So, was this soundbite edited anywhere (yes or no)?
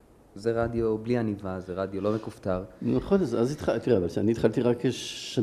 no